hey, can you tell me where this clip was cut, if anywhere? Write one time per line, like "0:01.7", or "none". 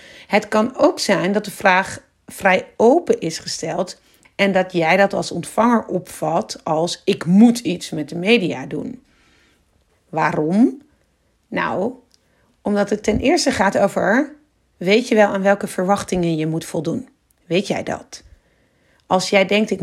0:04.2
0:09.9